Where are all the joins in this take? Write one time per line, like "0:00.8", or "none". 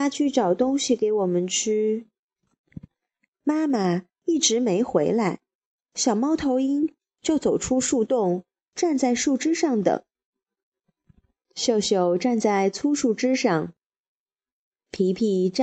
0:02.4